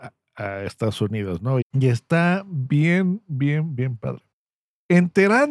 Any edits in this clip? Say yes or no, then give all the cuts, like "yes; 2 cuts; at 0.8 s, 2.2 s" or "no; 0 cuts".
yes; 1 cut; at 1.6 s